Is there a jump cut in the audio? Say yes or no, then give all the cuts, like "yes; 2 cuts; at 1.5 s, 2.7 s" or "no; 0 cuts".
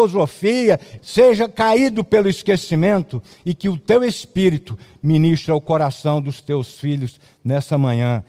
yes; 1 cut; at 1.0 s